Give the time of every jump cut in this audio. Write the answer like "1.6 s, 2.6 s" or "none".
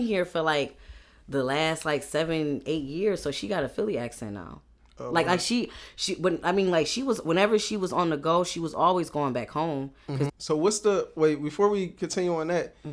10.3 s